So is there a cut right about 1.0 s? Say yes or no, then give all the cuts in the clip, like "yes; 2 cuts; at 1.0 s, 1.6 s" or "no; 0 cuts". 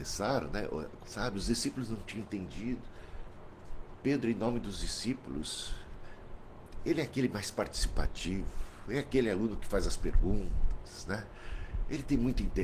yes; 1 cut; at 1.0 s